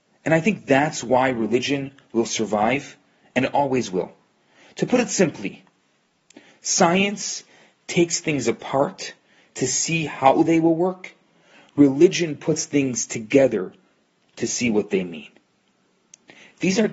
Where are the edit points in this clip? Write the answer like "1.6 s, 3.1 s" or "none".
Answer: none